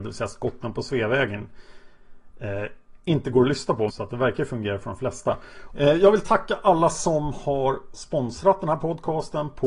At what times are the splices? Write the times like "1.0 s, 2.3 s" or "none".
3.9 s, 5.7 s